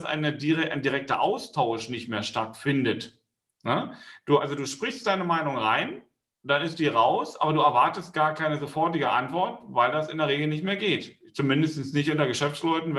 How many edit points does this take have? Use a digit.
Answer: 0